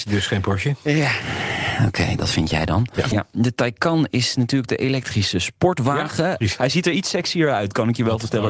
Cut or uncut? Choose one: cut